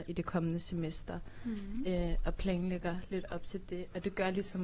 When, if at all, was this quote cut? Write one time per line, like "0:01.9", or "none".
none